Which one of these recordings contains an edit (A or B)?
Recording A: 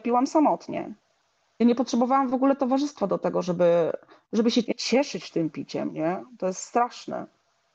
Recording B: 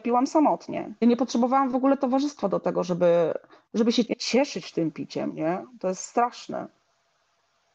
B